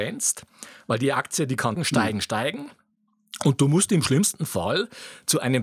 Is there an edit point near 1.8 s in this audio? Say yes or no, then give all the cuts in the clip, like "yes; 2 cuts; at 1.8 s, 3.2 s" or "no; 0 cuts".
yes; 1 cut; at 1.8 s